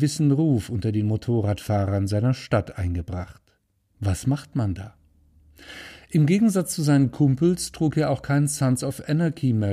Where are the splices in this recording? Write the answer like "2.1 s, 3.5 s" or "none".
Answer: 3.9 s